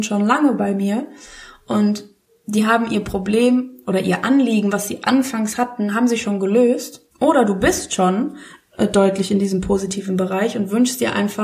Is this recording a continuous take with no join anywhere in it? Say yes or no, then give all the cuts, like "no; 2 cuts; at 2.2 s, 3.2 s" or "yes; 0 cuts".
no; 1 cut; at 7.1 s